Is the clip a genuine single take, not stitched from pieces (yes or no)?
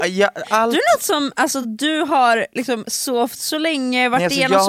yes